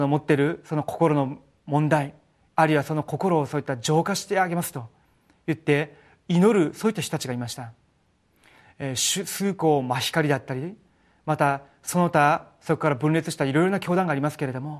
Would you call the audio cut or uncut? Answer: uncut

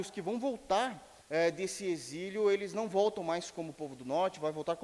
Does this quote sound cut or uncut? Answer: cut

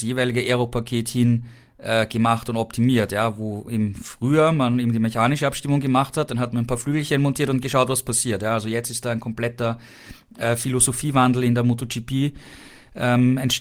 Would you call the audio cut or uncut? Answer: uncut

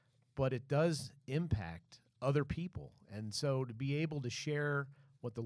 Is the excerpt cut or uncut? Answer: uncut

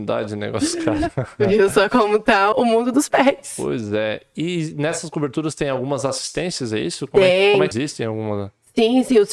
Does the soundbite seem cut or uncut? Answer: cut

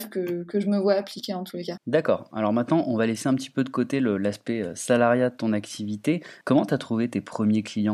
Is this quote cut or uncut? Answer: cut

